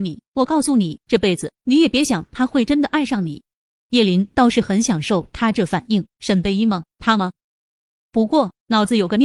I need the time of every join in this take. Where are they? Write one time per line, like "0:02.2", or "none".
0:01.0
0:03.7
0:06.1